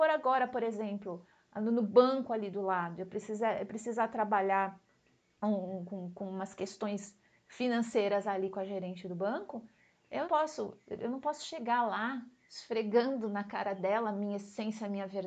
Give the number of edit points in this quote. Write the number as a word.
one